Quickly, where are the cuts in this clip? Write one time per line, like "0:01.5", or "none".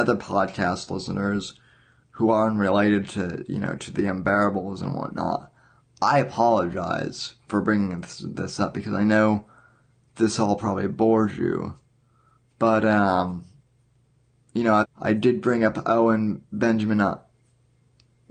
0:14.8